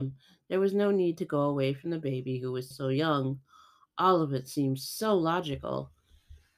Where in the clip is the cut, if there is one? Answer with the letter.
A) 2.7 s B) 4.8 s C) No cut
A